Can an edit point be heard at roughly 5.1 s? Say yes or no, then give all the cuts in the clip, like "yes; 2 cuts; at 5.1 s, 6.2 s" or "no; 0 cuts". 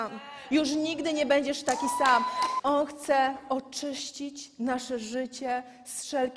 no; 1 cut; at 2.6 s